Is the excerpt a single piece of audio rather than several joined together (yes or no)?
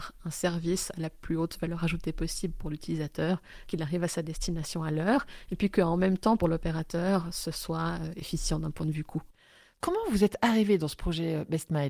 no